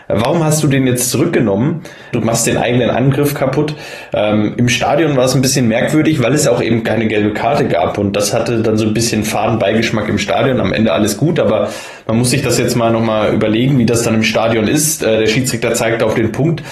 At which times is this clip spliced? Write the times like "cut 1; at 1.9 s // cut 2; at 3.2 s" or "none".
cut 1; at 2.1 s